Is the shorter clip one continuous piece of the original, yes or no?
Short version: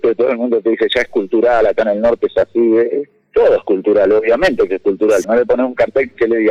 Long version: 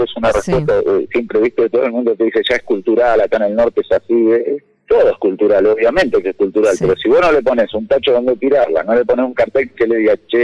no